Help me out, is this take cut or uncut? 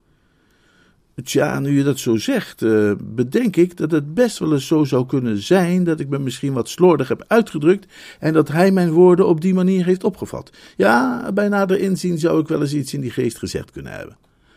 uncut